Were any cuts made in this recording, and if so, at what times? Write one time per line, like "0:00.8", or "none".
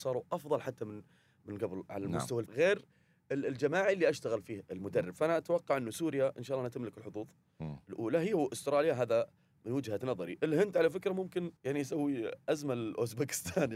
0:02.5
0:11.6